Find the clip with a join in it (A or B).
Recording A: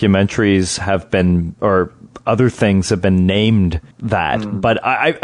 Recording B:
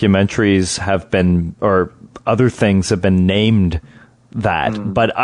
A